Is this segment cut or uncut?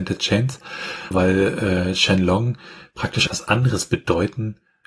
cut